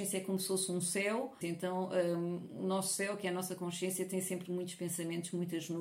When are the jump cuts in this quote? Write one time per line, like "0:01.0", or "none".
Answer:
0:01.4